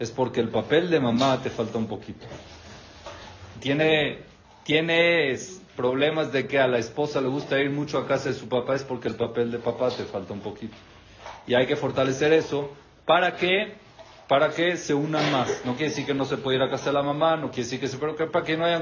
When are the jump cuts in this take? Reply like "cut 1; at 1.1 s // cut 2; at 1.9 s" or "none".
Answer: none